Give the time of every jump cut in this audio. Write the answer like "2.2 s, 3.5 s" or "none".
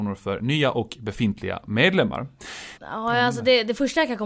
2.8 s